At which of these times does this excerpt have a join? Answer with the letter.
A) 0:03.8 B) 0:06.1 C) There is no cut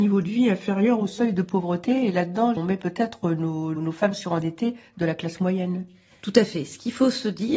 A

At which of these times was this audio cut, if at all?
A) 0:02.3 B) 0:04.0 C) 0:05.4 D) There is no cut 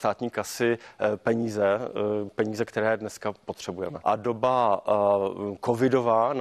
B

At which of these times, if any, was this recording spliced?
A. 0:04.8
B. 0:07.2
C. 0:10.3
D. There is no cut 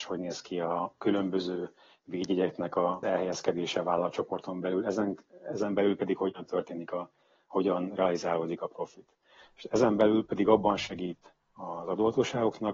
C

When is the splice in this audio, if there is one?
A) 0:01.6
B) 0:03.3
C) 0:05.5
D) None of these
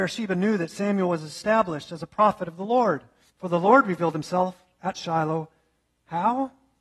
B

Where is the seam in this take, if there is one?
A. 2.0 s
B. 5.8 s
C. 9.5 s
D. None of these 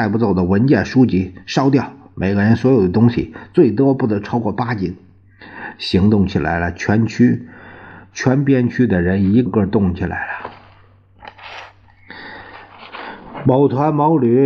C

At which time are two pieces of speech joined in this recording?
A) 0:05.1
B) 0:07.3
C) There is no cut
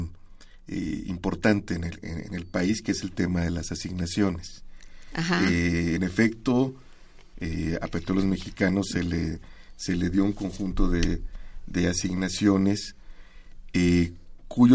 B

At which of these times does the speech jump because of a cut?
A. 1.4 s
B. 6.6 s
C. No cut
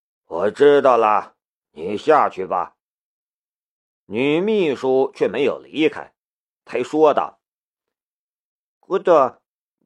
B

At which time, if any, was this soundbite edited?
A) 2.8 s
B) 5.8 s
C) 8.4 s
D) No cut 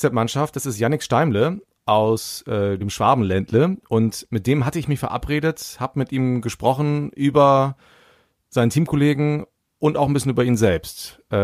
D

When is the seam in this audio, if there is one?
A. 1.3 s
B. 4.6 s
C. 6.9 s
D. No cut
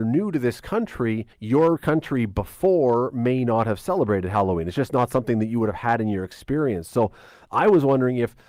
A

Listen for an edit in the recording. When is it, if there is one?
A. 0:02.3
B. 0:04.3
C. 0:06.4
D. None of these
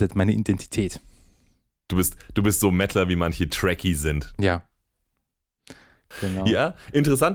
B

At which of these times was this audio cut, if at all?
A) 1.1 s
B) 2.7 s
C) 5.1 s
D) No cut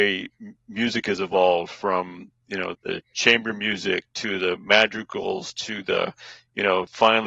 B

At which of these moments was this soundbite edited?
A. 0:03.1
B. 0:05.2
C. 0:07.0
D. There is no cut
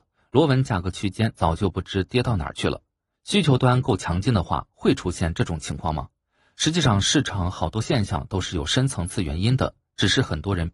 A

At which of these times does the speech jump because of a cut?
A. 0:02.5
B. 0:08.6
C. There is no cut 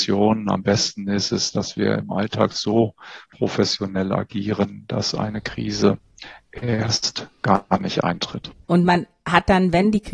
B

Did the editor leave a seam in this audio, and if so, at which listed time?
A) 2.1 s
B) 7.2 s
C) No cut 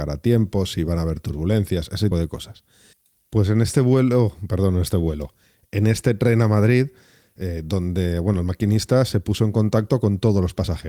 A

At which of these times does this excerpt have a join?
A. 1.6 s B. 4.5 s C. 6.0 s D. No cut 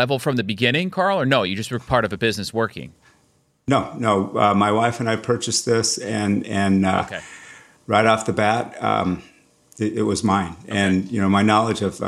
D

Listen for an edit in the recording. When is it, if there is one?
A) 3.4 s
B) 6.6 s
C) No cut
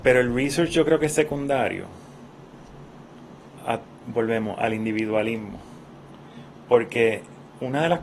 C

